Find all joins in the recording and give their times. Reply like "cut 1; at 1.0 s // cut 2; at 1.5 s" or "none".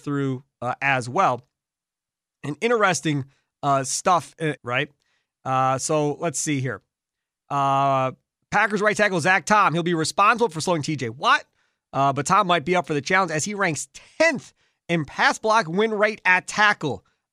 cut 1; at 4.6 s